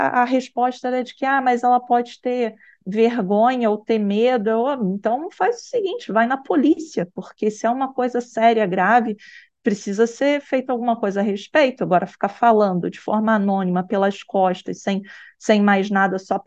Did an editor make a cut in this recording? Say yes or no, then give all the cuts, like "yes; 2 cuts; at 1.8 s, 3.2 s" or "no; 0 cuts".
no; 0 cuts